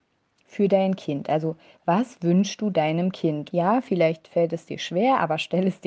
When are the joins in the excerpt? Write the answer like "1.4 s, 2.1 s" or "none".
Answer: 3.5 s